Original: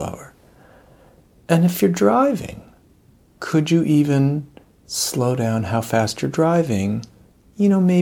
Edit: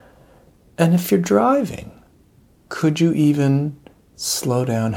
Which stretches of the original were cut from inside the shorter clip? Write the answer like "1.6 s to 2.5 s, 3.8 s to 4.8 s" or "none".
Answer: none